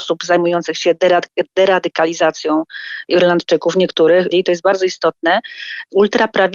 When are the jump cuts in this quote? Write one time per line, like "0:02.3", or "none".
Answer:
0:04.3